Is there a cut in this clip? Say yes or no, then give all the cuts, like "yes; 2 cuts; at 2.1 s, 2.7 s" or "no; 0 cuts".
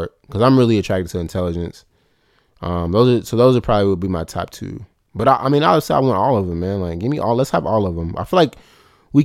no; 0 cuts